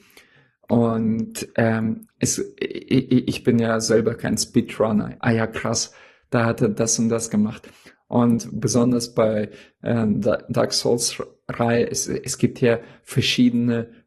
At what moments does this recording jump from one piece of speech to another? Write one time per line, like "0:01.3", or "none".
0:05.2